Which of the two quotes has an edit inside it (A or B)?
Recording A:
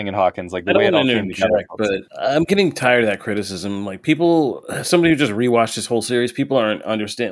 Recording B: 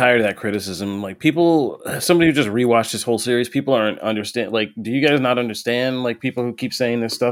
A